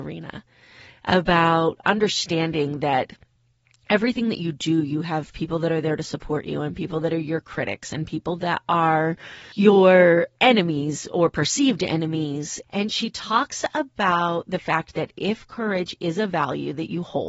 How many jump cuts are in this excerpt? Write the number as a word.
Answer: one